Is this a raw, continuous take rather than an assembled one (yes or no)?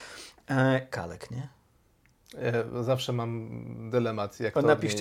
no